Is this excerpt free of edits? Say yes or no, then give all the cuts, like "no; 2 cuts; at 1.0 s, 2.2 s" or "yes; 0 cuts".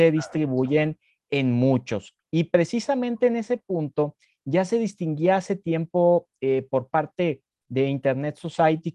no; 1 cut; at 2.2 s